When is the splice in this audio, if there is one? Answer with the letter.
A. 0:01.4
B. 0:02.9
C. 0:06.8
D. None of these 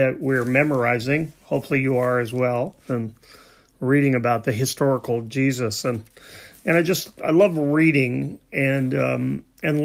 B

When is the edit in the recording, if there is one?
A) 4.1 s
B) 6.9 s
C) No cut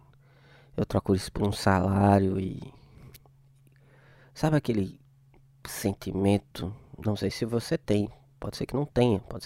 C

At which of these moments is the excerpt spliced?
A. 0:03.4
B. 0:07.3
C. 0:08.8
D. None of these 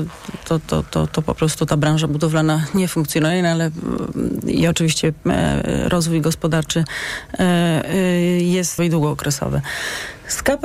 C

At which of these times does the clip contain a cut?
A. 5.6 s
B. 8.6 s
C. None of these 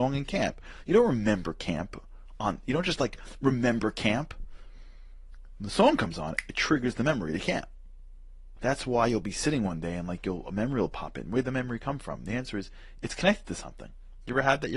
B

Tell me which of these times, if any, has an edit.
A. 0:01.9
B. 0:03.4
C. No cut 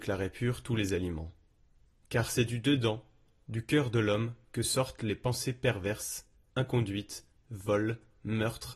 A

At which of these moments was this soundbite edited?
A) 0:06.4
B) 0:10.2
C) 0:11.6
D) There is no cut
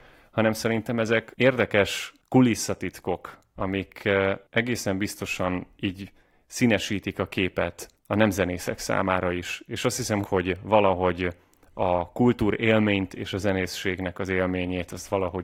B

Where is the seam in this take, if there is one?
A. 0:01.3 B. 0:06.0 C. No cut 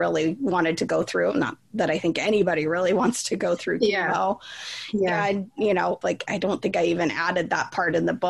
B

